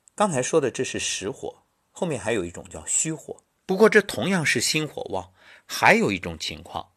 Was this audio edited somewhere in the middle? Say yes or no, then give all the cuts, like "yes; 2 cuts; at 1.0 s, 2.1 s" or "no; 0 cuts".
yes; 1 cut; at 3.6 s